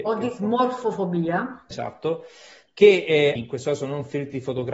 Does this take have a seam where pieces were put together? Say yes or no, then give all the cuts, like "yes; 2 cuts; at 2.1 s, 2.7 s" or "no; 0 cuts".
yes; 2 cuts; at 1.7 s, 3.4 s